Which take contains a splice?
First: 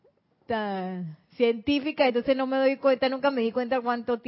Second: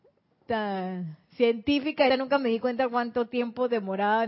second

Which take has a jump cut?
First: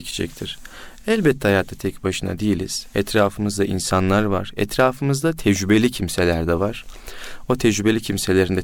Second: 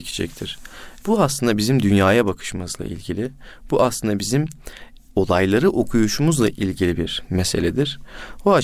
second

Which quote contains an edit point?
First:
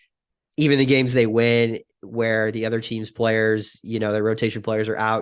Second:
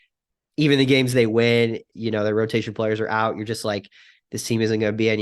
second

